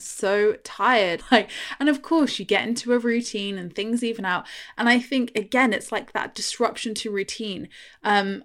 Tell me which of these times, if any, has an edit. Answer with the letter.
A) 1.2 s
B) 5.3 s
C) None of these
A